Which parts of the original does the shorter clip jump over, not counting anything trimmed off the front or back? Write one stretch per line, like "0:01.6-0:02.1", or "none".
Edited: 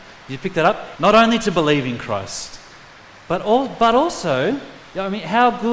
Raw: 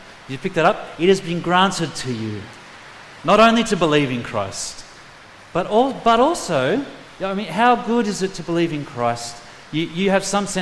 0:01.0-0:03.2

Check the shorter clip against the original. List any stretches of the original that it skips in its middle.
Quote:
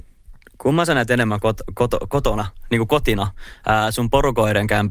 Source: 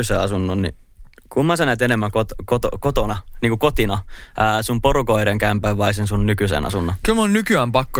none

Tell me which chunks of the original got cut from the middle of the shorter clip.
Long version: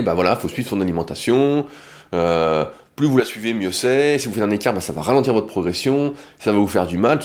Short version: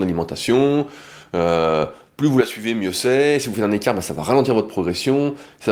none

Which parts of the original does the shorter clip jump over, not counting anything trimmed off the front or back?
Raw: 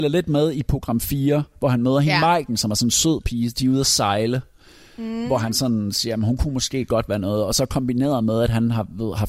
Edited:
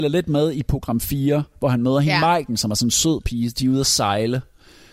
none

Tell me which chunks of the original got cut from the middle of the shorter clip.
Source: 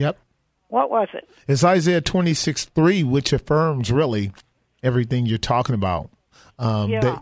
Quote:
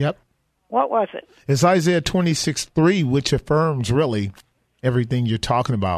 none

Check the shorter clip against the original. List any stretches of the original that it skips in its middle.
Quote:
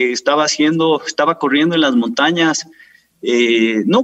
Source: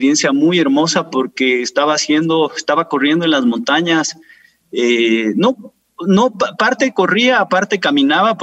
none

